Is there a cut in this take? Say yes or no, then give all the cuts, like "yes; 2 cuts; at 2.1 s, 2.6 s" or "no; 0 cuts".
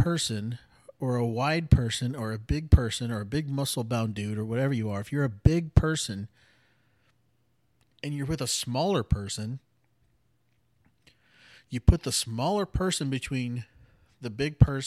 no; 0 cuts